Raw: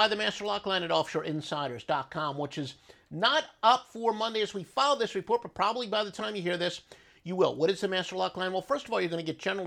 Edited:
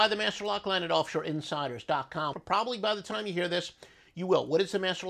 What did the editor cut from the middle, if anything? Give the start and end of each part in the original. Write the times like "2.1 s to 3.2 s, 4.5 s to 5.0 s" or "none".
2.3 s to 5.4 s